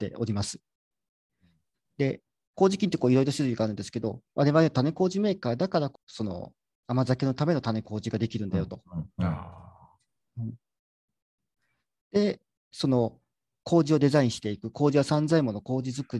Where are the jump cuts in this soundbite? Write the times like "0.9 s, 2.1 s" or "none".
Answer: 5.9 s